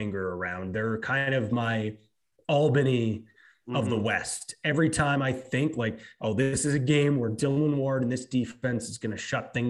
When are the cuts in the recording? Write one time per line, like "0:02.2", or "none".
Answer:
none